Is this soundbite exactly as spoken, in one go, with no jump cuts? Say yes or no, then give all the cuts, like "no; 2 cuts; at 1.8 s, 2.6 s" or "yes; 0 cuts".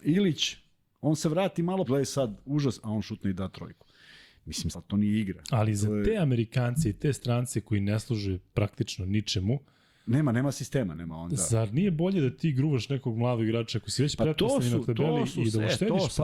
no; 2 cuts; at 1.8 s, 4.7 s